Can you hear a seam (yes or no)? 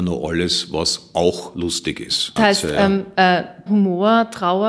yes